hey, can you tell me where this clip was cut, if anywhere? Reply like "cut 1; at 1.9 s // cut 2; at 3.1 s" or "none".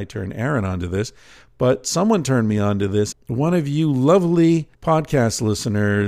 cut 1; at 3.1 s // cut 2; at 4.7 s